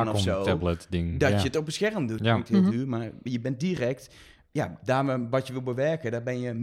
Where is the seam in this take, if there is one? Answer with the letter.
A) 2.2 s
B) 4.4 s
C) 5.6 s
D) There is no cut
A